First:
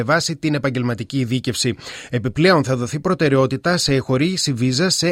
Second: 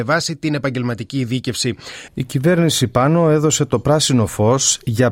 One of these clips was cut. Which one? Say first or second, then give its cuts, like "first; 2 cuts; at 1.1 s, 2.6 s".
second; 1 cut; at 2.1 s